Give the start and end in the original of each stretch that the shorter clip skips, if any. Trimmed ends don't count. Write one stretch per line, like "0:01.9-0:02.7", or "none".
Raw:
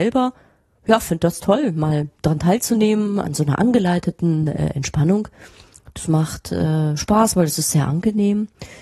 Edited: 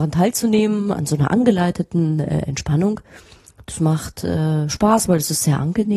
none